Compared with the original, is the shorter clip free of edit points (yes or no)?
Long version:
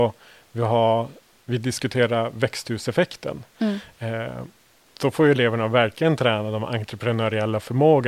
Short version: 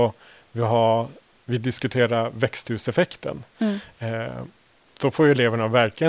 yes